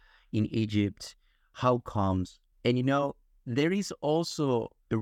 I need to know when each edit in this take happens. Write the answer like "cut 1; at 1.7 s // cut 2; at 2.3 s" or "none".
cut 1; at 2.5 s

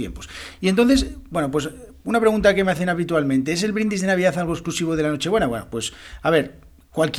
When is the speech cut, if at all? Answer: none

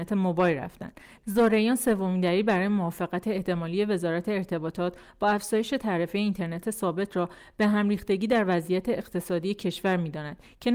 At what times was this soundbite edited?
cut 1; at 1.2 s

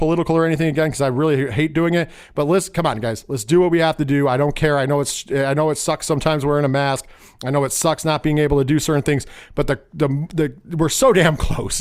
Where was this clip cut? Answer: none

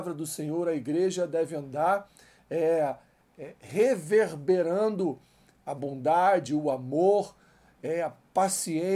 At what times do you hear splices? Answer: cut 1; at 6.5 s

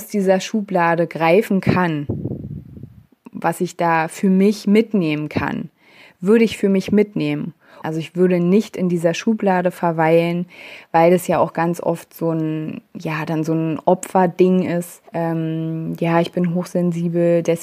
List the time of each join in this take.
cut 1; at 7.8 s // cut 2; at 15.1 s

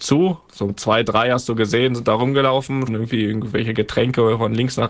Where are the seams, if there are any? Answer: cut 1; at 2.9 s

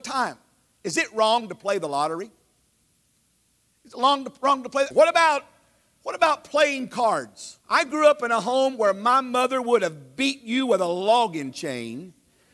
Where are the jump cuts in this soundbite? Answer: cut 1; at 4.9 s // cut 2; at 7.6 s

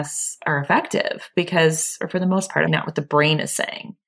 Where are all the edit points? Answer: cut 1; at 2.7 s

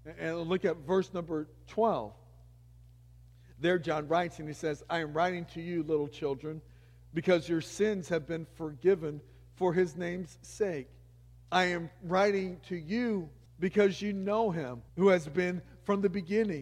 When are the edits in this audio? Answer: cut 1; at 13.5 s // cut 2; at 14.9 s

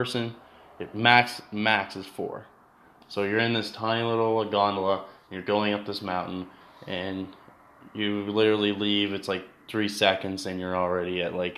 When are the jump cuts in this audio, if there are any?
none

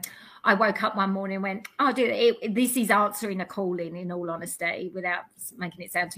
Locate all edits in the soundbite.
none

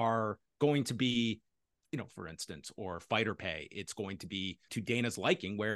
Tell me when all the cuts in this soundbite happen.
cut 1; at 2.1 s // cut 2; at 4.7 s

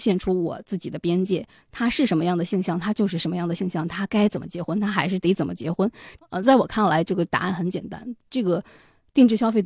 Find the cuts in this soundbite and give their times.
cut 1; at 1.6 s // cut 2; at 6.2 s

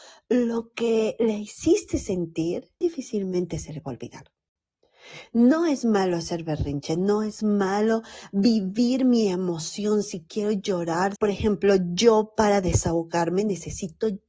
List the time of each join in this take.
cut 1; at 2.8 s // cut 2; at 11.2 s

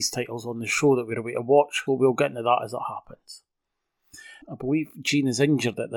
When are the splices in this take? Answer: cut 1; at 1.9 s // cut 2; at 4.4 s

